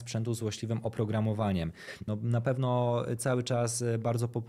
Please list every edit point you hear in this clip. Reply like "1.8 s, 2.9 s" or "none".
2.1 s

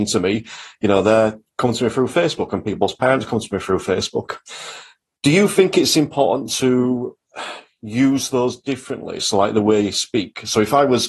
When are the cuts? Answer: none

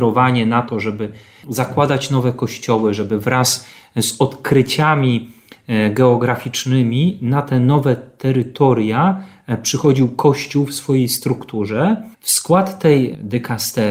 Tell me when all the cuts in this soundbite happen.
12.1 s

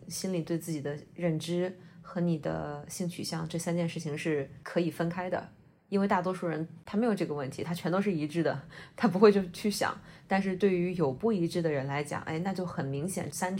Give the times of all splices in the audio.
none

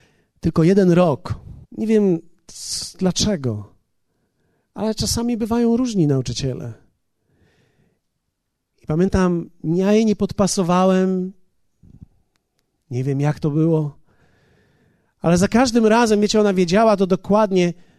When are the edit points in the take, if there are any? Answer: 1.6 s

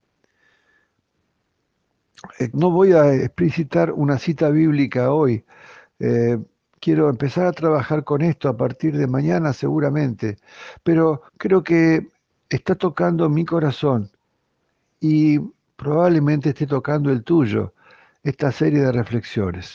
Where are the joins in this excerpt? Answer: 2.5 s, 11.3 s

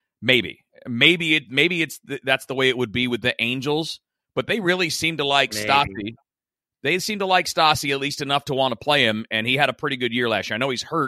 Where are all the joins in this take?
none

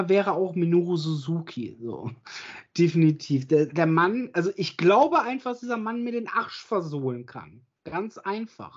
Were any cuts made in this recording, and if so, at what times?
3.7 s

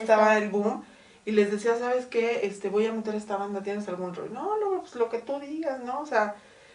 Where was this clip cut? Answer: none

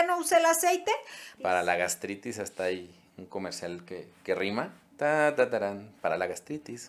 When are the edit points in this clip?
1.4 s

